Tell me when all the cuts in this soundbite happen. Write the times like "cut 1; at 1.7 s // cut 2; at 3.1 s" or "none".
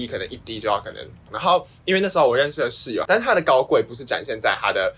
cut 1; at 1.3 s // cut 2; at 3.1 s